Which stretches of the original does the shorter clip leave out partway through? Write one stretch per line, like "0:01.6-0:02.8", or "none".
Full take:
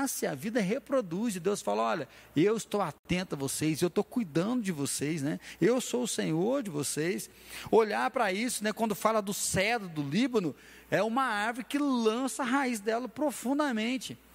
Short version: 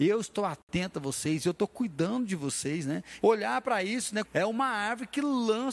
0:05.6-0:07.7
0:08.7-0:10.8